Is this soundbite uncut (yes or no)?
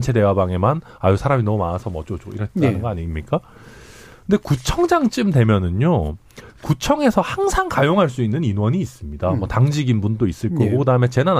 yes